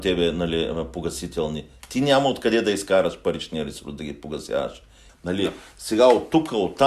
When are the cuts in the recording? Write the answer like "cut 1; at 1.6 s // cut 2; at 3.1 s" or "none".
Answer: cut 1; at 5.1 s